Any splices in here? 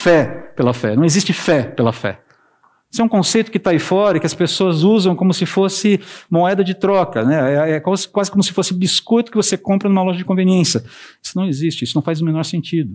no; 0 cuts

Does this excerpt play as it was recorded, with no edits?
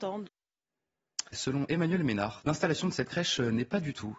no; 2 cuts; at 1.3 s, 2.4 s

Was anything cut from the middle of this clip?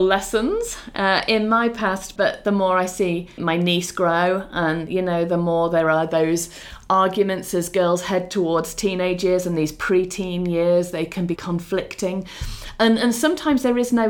yes; 3 cuts; at 2.2 s, 3.4 s, 11.4 s

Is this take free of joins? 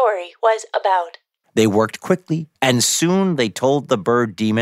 no; 2 cuts; at 1.4 s, 2.6 s

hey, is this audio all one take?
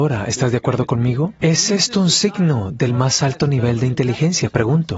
no; 1 cut; at 1.4 s

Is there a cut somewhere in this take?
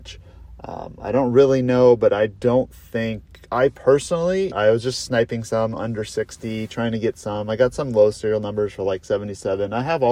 yes; 1 cut; at 4.5 s

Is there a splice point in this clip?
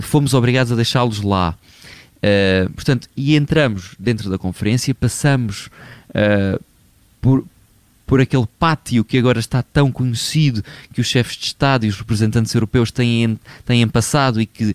no; 0 cuts

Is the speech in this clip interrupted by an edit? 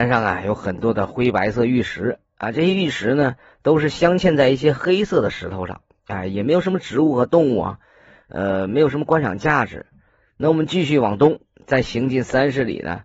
no; 0 cuts

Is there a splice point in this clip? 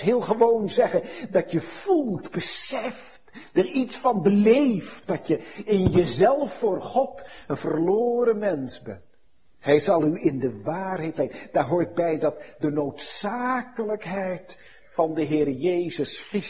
no; 0 cuts

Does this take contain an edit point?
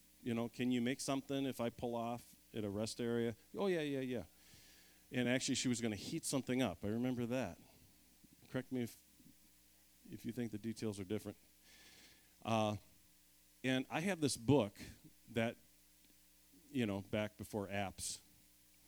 no; 0 cuts

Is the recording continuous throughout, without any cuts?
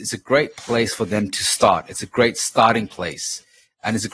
yes; 0 cuts

